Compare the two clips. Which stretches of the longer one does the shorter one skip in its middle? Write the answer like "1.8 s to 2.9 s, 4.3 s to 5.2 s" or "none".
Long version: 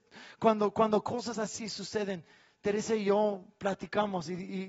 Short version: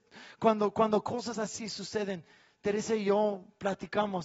none